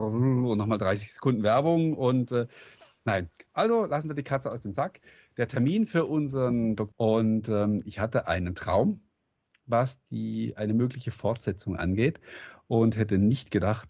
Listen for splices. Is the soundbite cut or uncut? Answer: cut